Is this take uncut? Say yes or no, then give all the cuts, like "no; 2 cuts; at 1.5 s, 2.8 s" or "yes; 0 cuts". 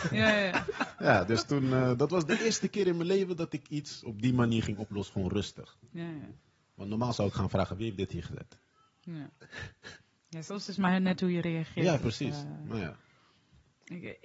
yes; 0 cuts